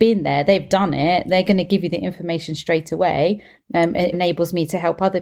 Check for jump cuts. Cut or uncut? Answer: cut